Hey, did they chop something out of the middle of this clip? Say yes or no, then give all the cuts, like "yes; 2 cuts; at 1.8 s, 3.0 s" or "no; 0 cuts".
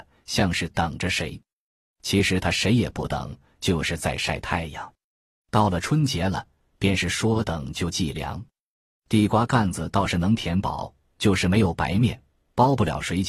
no; 0 cuts